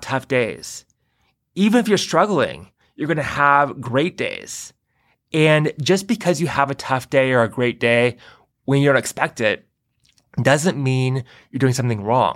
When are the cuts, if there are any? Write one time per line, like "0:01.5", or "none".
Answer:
none